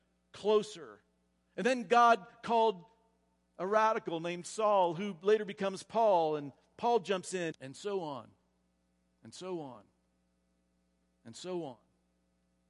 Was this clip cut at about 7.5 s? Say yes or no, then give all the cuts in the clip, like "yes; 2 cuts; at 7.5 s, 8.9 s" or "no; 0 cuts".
yes; 1 cut; at 7.5 s